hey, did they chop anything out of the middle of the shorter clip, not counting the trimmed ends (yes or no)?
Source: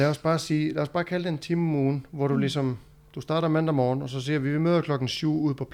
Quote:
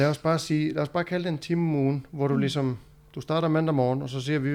no